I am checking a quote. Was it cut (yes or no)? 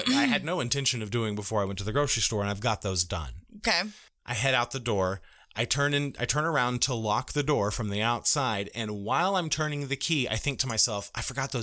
no